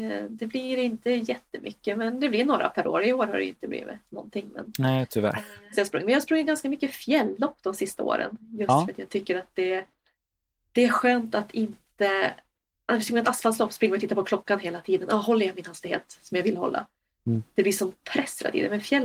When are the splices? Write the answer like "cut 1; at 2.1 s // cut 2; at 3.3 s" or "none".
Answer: cut 1; at 5.7 s